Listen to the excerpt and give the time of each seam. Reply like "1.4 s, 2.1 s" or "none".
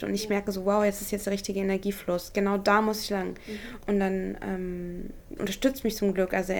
3.8 s, 5.4 s